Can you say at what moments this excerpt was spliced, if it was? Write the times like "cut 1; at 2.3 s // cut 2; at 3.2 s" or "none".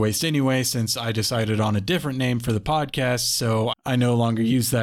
none